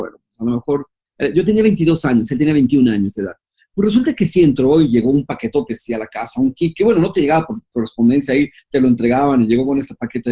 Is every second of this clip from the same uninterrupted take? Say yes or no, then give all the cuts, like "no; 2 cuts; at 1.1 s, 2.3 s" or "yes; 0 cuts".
yes; 0 cuts